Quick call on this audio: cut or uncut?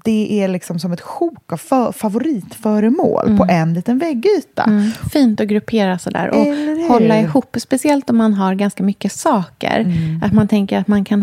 uncut